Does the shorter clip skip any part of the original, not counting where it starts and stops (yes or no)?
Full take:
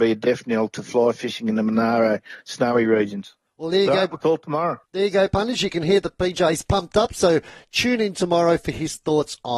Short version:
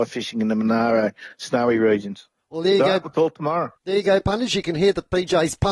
no